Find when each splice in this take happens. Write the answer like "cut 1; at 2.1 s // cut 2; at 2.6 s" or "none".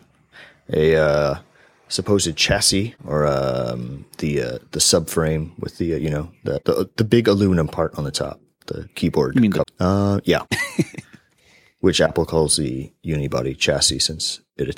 cut 1; at 9.6 s

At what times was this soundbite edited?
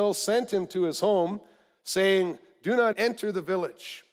cut 1; at 2.9 s

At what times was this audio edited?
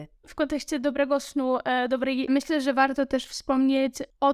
cut 1; at 2.3 s

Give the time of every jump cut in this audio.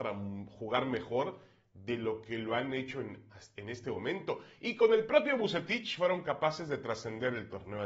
none

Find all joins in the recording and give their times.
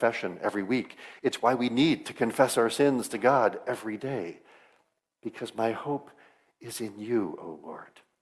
none

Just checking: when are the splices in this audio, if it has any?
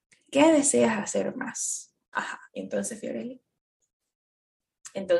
cut 1; at 2.1 s

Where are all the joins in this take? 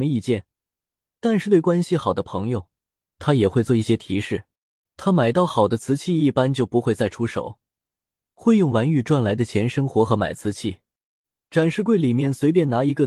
cut 1; at 11.3 s

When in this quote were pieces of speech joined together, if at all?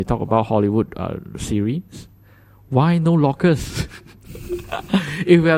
none

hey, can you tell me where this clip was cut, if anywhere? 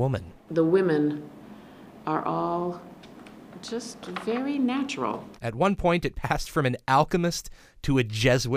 cut 1; at 5.4 s

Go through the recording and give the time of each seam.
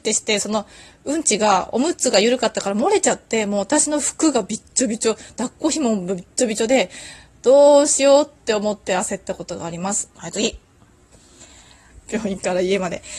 cut 1; at 10.1 s // cut 2; at 11.9 s

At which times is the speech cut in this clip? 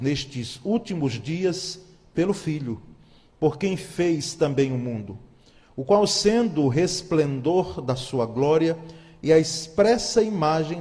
cut 1; at 3.2 s

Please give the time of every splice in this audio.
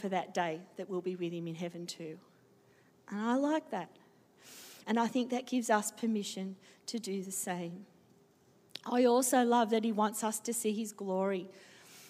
cut 1; at 4.8 s

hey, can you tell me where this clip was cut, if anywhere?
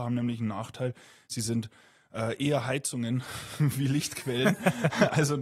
none

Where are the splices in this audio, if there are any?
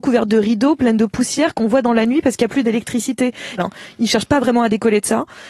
cut 1; at 3.6 s

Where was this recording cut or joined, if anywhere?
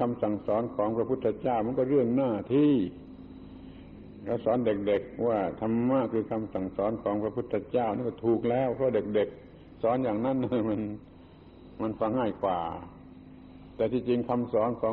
cut 1; at 12.1 s

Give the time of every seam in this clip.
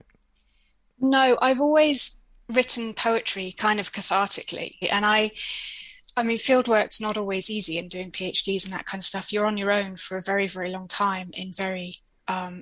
cut 1; at 4.8 s

